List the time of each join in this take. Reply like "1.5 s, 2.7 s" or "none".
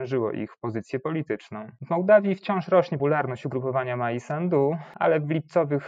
3.0 s